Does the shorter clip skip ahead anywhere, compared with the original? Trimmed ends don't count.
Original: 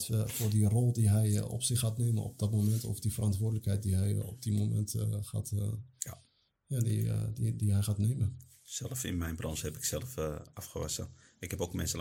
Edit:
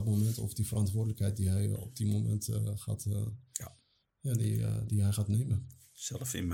yes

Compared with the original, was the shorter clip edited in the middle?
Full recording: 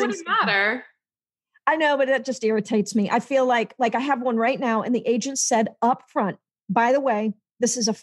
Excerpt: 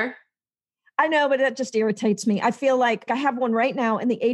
yes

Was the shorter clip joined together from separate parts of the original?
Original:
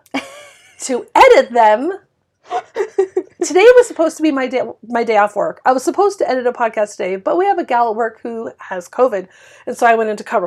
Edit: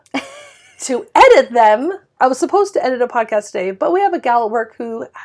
yes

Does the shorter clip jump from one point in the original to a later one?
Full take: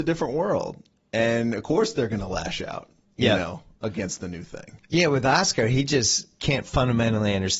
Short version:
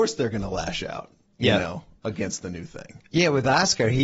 no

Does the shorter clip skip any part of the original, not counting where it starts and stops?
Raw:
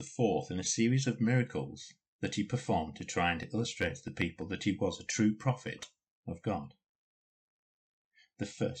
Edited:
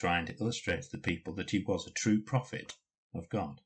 no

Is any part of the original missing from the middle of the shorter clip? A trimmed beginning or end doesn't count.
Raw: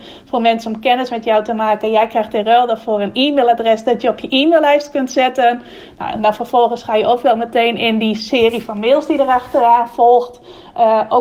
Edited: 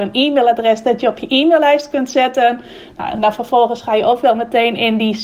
no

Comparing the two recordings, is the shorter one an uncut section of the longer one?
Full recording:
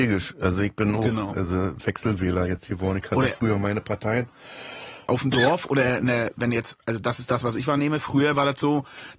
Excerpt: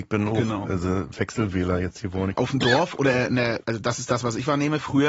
no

